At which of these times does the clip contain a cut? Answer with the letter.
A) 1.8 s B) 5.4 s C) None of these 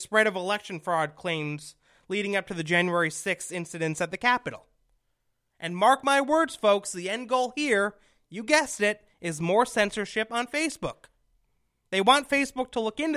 C